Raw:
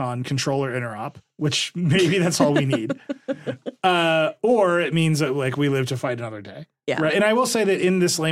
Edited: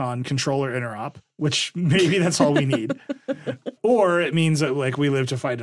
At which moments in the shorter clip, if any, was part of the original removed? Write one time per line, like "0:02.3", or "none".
0:03.8